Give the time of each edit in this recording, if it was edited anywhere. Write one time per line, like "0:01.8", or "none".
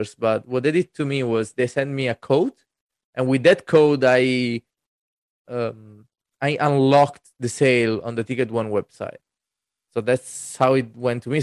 none